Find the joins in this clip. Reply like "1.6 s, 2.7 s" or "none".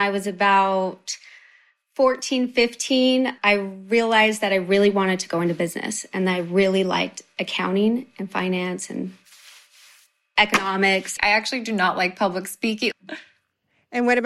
3.4 s, 11.2 s, 12.9 s